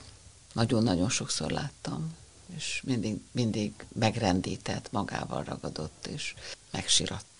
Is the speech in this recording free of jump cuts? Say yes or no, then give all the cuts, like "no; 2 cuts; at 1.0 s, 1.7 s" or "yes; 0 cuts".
yes; 0 cuts